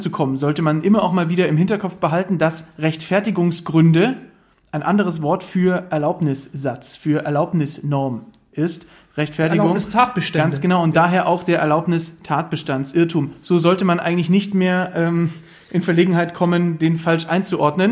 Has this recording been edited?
no; 0 cuts

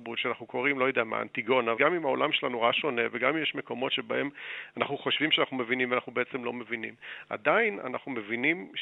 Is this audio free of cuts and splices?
no; 1 cut; at 1.8 s

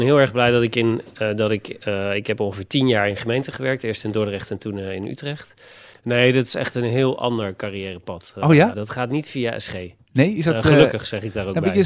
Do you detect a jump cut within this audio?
yes; 2 cuts; at 5.9 s, 8.7 s

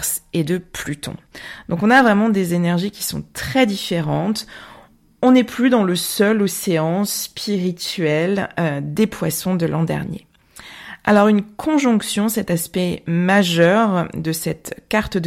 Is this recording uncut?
yes; 0 cuts

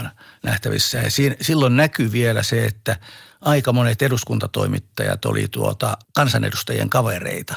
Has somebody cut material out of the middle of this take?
yes; 1 cut; at 6.0 s

